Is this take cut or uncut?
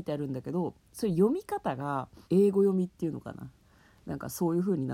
cut